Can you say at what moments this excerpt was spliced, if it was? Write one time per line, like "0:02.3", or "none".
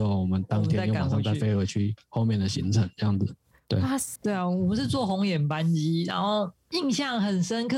0:04.2